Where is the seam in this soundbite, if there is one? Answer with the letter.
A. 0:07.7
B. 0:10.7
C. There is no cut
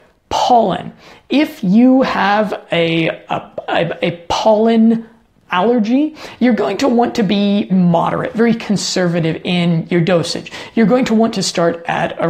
A